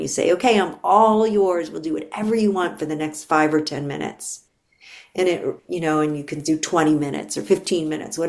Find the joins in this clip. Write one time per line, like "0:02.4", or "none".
none